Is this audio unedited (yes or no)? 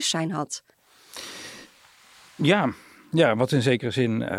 yes